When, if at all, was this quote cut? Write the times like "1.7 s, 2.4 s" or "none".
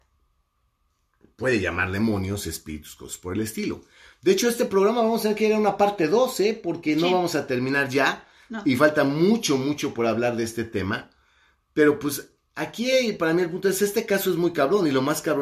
none